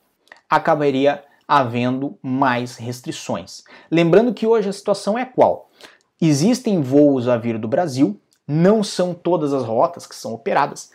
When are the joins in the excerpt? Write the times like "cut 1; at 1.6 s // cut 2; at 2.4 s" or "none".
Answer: none

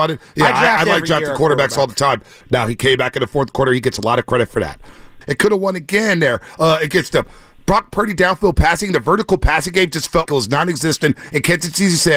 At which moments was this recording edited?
cut 1; at 2.4 s // cut 2; at 5.2 s // cut 3; at 10.3 s

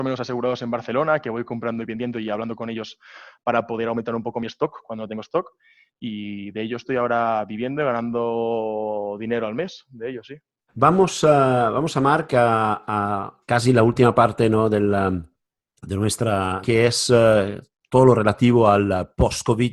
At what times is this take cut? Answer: cut 1; at 10.7 s // cut 2; at 16.6 s

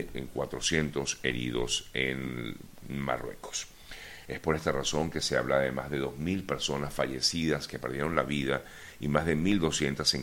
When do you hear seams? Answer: cut 1; at 2.8 s // cut 2; at 4.3 s

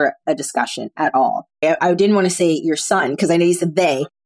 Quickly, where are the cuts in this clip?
cut 1; at 1.6 s

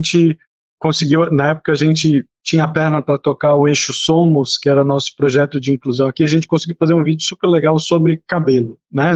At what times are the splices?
none

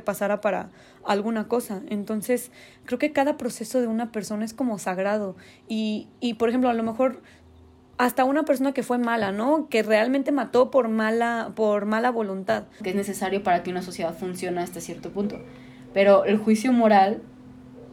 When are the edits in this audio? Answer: cut 1; at 12.8 s

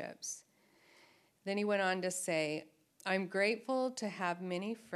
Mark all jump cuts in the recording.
cut 1; at 2.9 s

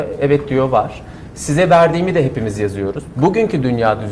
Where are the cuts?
cut 1; at 3.1 s

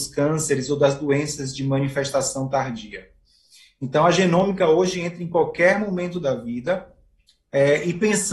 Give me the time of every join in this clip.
none

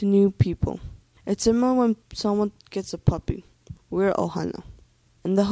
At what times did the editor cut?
cut 1; at 3.7 s

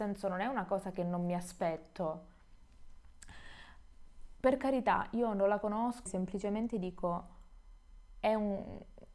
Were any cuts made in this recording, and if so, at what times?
cut 1; at 6.1 s

